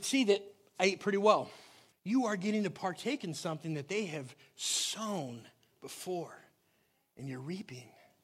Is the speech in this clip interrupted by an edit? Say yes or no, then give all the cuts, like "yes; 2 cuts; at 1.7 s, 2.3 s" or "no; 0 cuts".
yes; 1 cut; at 1.9 s